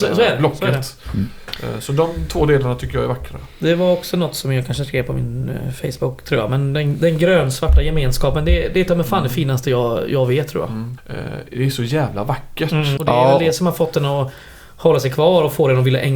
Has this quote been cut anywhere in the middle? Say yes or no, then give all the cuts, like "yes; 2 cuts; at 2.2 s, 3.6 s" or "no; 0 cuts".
yes; 2 cuts; at 11.0 s, 13.0 s